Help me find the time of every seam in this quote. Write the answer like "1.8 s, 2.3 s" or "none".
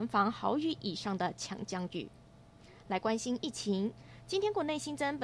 none